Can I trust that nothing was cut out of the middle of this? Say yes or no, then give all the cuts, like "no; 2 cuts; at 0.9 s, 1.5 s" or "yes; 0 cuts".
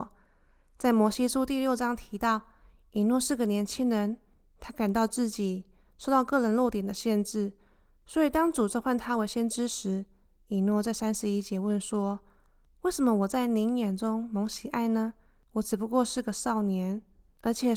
yes; 0 cuts